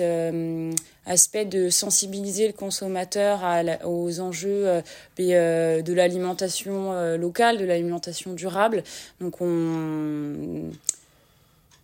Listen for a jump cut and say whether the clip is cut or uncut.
uncut